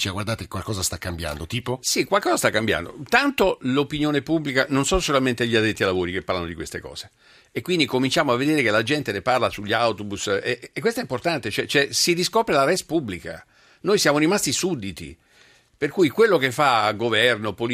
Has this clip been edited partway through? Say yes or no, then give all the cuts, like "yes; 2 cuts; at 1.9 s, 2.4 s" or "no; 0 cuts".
no; 0 cuts